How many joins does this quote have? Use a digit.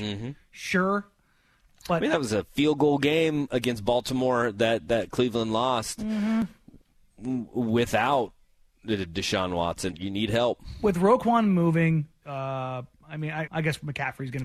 3